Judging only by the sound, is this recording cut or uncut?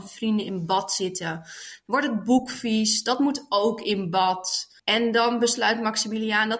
cut